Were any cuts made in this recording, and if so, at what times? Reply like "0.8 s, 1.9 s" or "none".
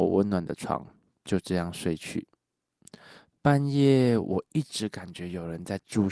none